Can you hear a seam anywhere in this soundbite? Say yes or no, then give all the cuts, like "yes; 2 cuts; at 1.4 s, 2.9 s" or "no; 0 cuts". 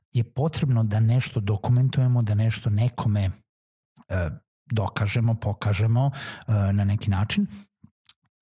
no; 0 cuts